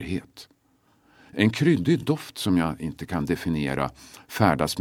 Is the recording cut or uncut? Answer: uncut